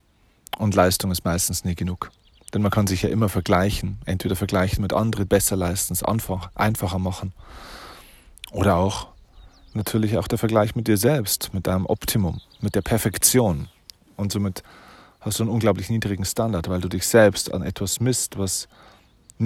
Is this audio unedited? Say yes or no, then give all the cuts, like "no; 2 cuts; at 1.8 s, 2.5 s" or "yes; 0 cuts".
no; 1 cut; at 5.3 s